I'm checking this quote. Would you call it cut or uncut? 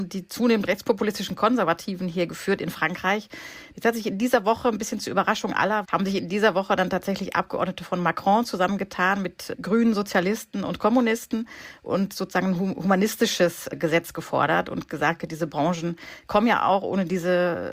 cut